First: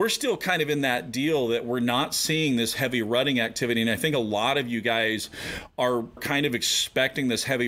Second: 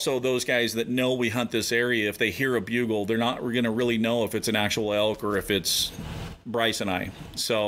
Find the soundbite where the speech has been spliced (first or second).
first